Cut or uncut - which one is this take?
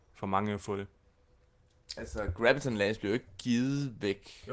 uncut